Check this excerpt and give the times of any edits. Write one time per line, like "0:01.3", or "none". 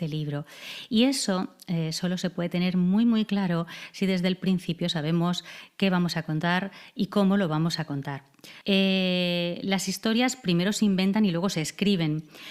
0:08.6